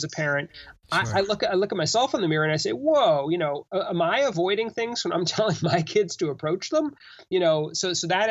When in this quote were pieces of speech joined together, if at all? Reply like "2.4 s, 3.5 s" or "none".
none